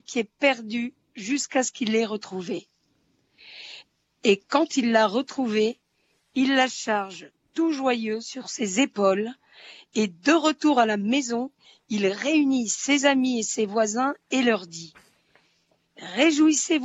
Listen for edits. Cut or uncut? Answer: uncut